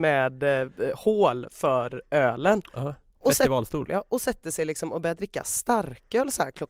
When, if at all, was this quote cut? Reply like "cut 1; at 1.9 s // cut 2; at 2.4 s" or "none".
cut 1; at 2.7 s // cut 2; at 3.9 s